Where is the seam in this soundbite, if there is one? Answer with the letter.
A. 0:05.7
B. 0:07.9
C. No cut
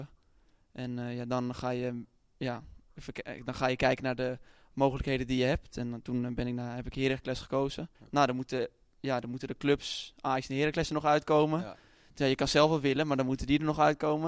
B